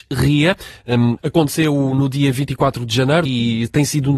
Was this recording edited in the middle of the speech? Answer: yes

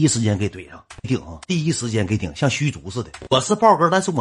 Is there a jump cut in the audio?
no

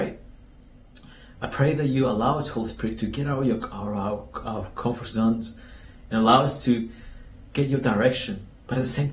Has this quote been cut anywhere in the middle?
yes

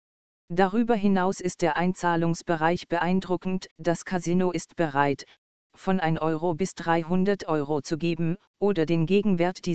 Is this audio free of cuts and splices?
no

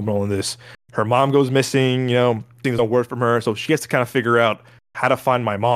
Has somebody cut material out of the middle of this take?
yes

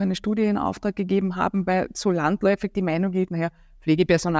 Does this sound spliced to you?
no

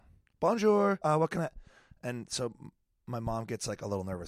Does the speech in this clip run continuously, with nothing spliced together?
no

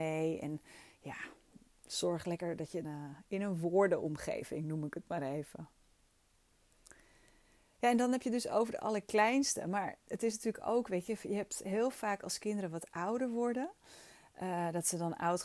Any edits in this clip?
yes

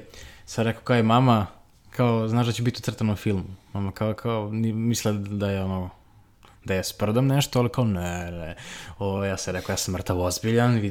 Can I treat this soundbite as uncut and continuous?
yes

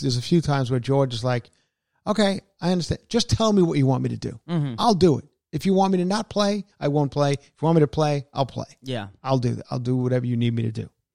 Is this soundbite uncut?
yes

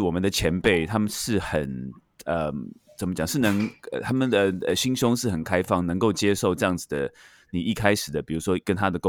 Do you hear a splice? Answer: no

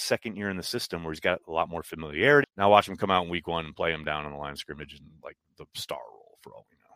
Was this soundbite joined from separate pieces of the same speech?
yes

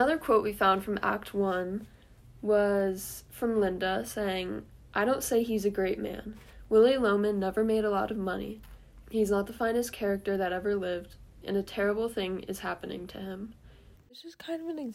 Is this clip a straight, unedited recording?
no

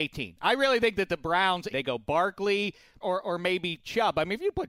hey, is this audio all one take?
no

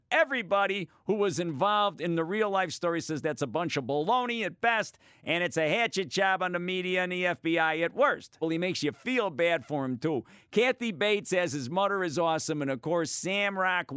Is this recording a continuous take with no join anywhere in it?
no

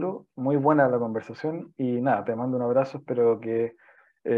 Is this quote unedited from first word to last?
yes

